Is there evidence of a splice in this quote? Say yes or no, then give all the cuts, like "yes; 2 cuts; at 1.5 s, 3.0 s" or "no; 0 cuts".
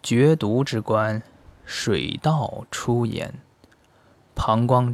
no; 0 cuts